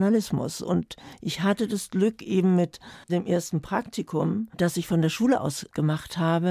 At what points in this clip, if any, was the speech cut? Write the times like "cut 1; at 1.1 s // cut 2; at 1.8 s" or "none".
cut 1; at 3.0 s